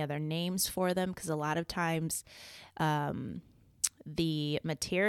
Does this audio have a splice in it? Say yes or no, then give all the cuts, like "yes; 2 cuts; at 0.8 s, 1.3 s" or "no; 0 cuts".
no; 0 cuts